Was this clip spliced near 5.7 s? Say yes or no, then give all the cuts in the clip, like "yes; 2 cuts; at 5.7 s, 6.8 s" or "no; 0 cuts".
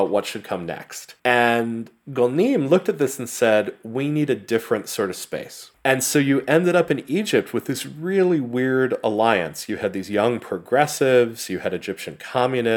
yes; 2 cuts; at 1.2 s, 5.7 s